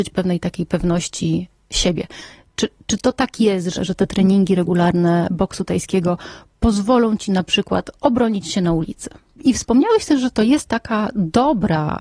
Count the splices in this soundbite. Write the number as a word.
two